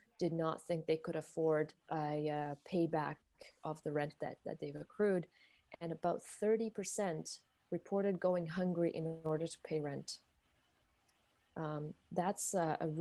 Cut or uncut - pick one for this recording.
cut